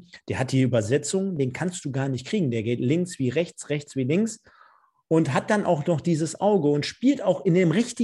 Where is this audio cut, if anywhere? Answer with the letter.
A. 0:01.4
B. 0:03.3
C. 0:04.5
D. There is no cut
A